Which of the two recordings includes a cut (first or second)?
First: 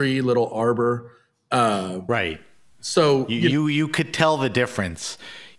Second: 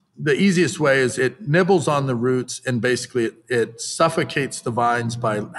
second